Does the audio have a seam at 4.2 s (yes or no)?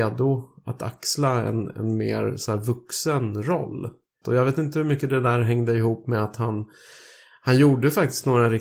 yes